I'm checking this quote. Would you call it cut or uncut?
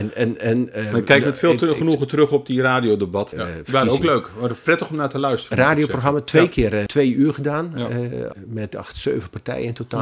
cut